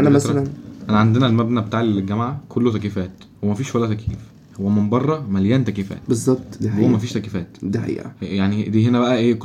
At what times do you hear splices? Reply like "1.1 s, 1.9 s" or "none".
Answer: none